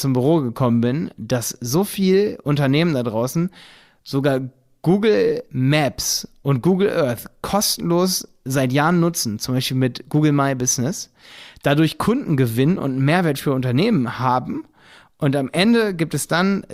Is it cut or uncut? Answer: uncut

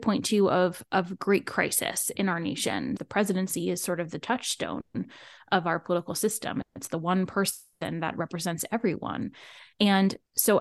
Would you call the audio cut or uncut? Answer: cut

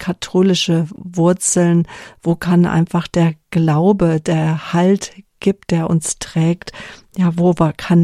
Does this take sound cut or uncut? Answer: uncut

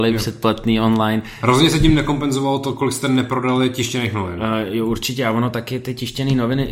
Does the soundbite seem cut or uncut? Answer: uncut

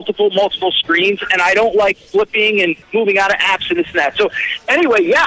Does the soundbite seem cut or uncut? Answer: cut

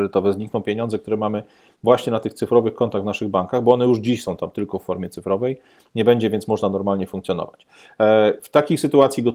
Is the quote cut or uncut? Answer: uncut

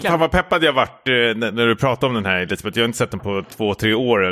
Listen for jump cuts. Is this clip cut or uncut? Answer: uncut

